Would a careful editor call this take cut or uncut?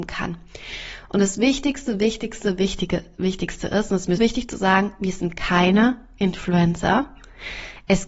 cut